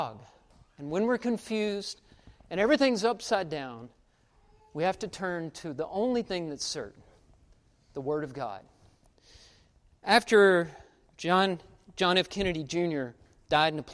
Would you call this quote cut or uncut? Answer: uncut